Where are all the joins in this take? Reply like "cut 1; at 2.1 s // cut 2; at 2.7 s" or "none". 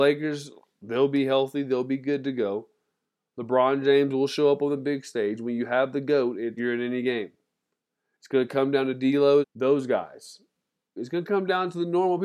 cut 1; at 6.6 s // cut 2; at 9.4 s // cut 3; at 11.0 s